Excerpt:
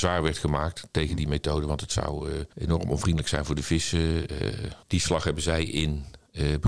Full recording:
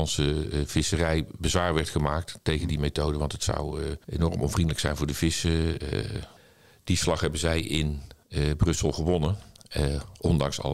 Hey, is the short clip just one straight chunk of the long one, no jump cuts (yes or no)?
no